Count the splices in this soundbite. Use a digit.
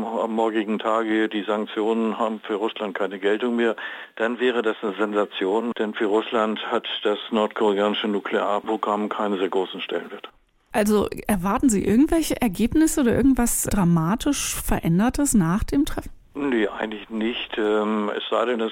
2